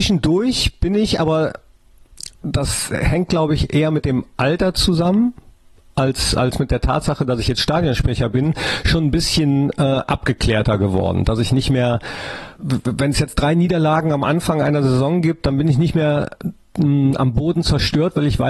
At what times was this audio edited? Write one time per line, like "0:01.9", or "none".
0:12.6